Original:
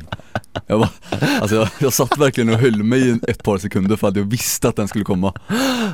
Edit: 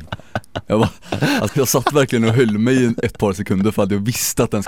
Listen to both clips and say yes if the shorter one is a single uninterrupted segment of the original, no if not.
no